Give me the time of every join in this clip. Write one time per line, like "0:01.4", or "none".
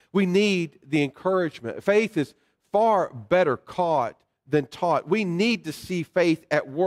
none